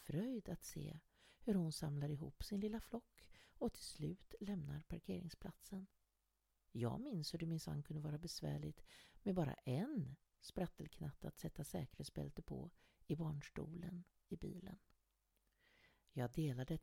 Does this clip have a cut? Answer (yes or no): no